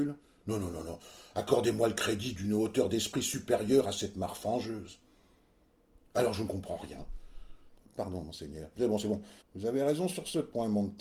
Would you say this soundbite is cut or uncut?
cut